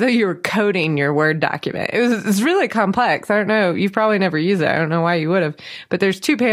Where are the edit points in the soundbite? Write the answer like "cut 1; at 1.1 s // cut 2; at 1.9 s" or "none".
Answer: none